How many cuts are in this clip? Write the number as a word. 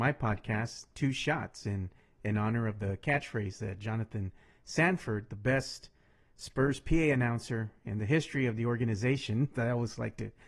one